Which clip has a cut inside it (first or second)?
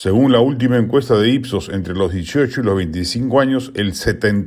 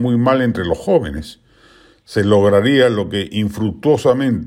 second